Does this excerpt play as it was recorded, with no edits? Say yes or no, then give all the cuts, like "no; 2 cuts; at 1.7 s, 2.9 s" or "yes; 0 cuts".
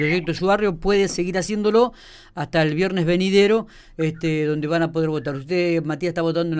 yes; 0 cuts